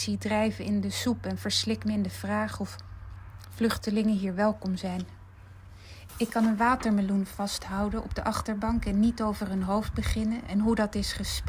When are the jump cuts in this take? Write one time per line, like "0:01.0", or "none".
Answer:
0:06.1